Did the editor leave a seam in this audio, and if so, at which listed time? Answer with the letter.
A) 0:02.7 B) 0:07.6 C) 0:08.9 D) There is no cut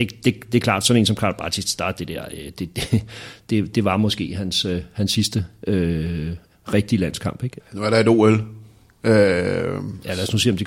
B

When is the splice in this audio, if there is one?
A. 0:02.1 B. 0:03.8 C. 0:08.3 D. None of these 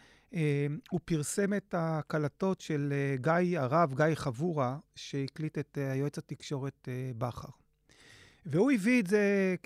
D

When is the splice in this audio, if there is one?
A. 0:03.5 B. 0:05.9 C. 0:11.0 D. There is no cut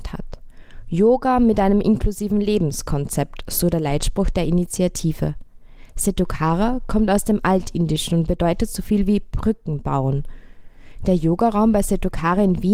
D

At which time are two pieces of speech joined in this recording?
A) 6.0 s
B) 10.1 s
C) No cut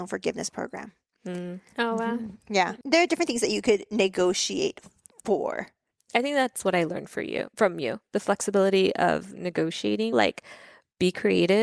B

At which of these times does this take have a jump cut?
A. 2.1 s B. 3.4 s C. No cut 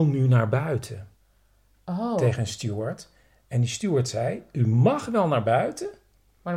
C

